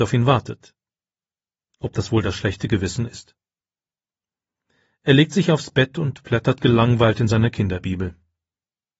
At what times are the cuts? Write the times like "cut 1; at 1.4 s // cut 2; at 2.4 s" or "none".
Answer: none

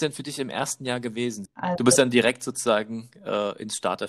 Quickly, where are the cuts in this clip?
cut 1; at 1.4 s

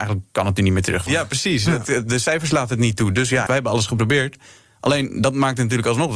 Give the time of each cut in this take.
cut 1; at 1.1 s // cut 2; at 3.5 s

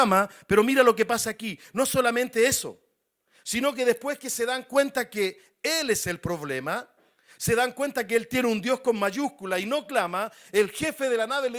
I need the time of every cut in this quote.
none

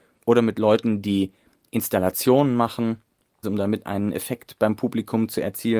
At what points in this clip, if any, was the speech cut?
cut 1; at 3.4 s

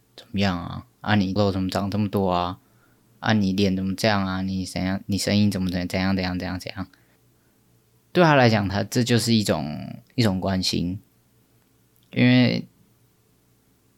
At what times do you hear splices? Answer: cut 1; at 1.4 s // cut 2; at 7.2 s

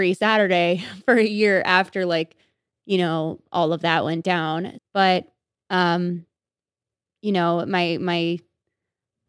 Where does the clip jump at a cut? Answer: cut 1; at 4.8 s

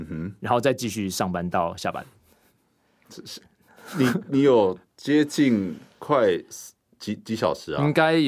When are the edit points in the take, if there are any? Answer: none

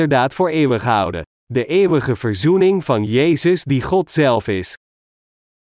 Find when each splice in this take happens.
cut 1; at 1.3 s

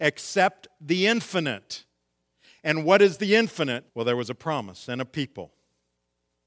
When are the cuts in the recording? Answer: cut 1; at 3.9 s

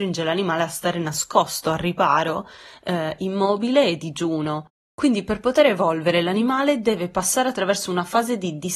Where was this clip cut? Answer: none

